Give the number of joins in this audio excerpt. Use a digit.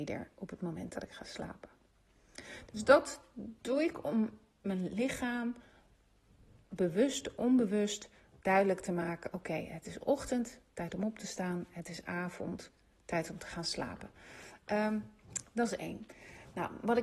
0